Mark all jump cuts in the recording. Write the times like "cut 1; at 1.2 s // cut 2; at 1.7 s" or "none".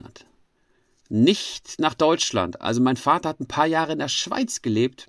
none